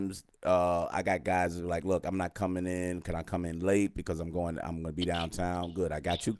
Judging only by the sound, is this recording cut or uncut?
uncut